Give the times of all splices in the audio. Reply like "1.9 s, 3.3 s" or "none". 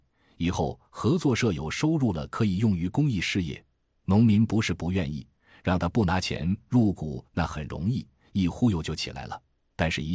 3.9 s, 7.3 s

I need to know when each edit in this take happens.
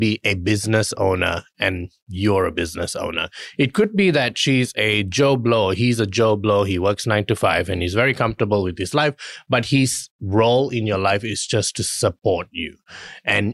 none

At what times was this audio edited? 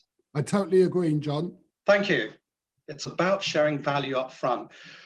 2.7 s

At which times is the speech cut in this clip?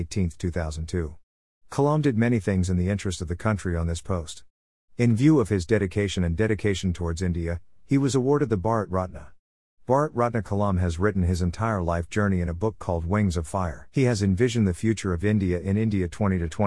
13.9 s

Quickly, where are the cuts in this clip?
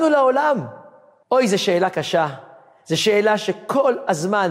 1.2 s

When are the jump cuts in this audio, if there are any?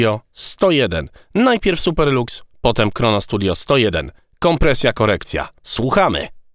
none

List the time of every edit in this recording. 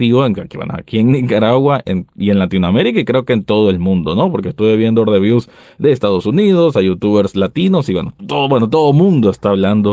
8.2 s

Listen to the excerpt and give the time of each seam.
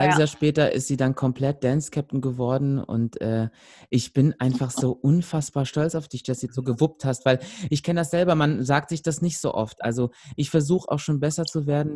6.5 s

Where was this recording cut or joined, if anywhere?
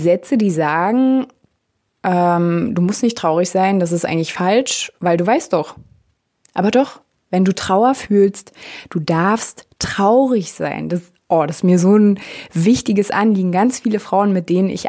none

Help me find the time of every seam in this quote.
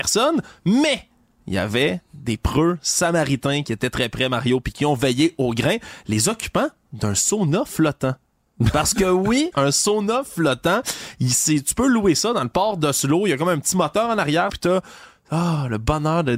9.5 s, 14.5 s

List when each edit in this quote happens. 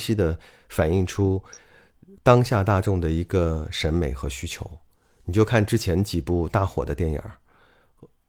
none

